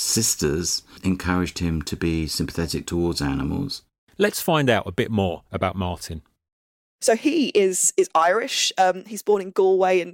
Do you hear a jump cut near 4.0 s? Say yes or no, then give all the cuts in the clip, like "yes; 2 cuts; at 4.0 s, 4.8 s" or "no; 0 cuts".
no; 0 cuts